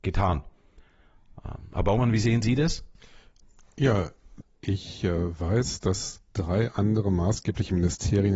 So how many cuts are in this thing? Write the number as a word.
one